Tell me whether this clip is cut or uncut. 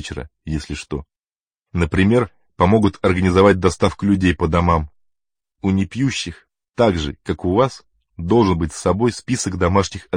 uncut